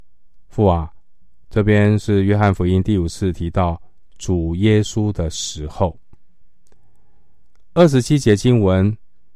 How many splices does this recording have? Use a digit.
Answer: 1